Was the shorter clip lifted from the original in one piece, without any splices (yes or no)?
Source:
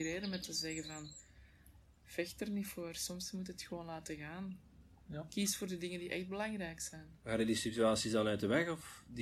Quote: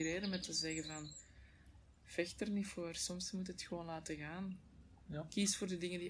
yes